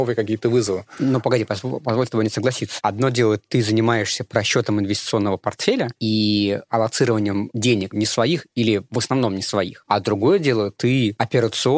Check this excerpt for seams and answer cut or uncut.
cut